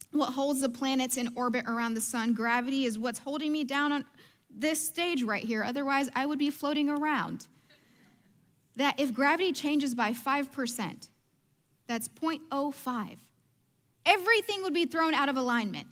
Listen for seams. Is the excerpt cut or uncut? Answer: uncut